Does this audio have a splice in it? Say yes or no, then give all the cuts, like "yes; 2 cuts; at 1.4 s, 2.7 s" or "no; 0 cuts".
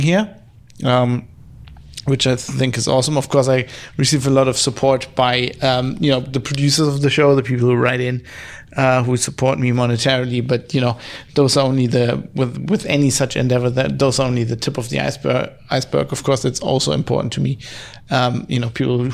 no; 0 cuts